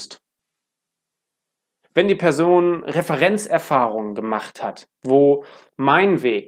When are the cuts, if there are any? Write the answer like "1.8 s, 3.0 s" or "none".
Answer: 1.8 s, 4.9 s